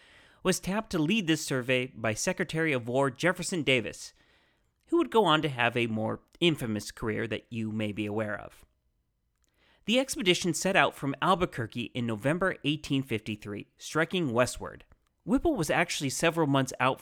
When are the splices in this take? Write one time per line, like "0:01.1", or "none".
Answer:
0:15.1

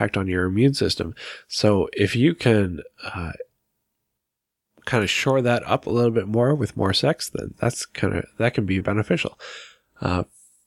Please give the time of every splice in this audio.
0:07.5
0:08.8

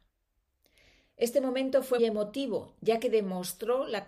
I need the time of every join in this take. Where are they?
0:02.0

